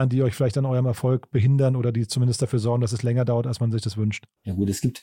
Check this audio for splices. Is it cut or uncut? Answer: uncut